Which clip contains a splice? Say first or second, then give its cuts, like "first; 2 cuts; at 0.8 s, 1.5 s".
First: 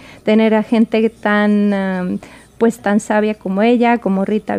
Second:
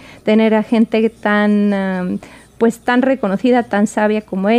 first; 1 cut; at 2.8 s